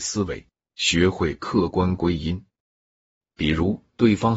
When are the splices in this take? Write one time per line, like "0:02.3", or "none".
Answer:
none